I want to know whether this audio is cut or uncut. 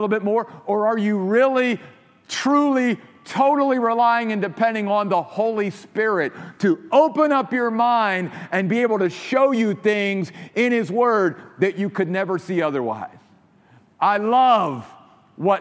uncut